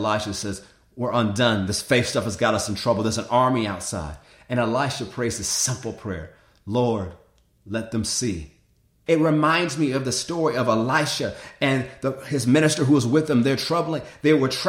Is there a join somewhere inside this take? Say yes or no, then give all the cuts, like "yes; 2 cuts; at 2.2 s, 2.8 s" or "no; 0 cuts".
yes; 1 cut; at 9.1 s